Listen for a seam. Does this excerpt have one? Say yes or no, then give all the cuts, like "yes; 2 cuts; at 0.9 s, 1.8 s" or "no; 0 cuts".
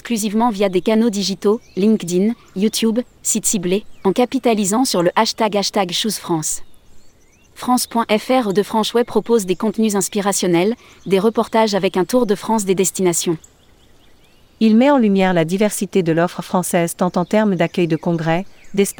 yes; 1 cut; at 7.5 s